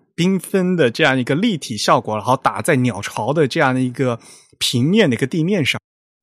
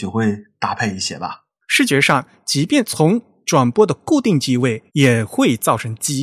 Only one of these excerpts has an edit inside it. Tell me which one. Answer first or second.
second